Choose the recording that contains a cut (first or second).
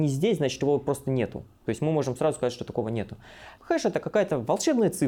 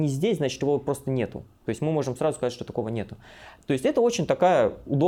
first